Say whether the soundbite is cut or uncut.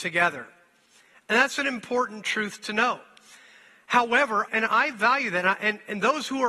cut